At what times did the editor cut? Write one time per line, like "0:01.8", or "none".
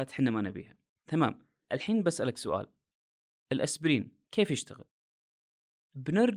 0:04.2

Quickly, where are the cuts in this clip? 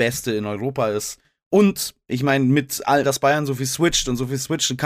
0:03.0

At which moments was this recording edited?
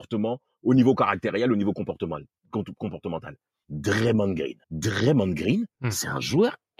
0:04.6
0:05.7

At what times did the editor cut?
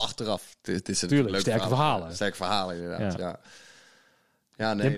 none

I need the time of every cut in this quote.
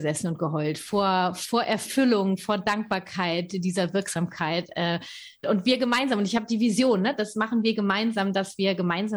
0:05.4

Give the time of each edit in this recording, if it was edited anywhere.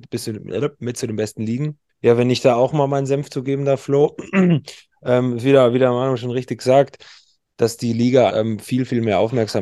0:01.9
0:08.3

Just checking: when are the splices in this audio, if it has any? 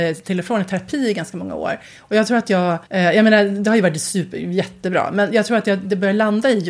0:02.9

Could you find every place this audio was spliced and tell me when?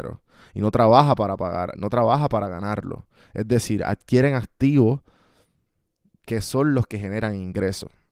0:01.7

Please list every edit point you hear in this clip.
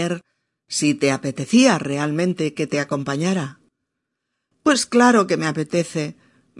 none

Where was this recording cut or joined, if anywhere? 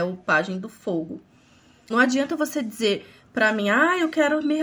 0:01.9

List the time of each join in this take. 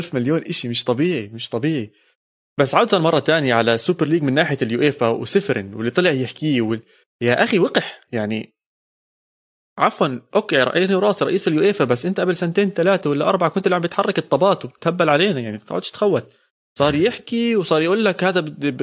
0:02.5

